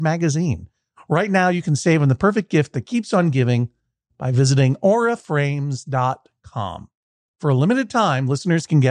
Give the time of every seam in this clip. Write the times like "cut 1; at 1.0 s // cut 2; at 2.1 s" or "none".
none